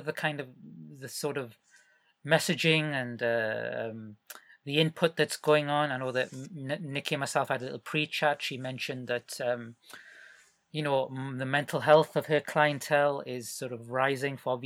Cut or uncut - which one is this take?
uncut